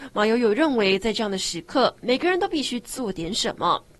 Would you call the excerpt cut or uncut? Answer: uncut